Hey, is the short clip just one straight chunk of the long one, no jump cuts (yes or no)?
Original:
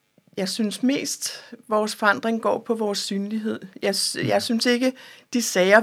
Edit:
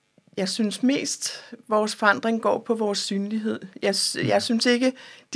yes